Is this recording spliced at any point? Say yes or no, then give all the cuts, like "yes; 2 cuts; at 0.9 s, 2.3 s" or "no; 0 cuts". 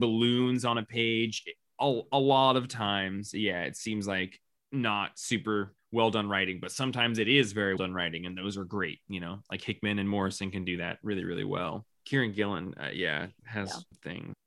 yes; 1 cut; at 7.8 s